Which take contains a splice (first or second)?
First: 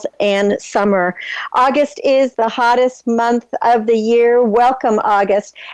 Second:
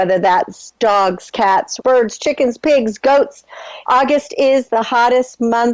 second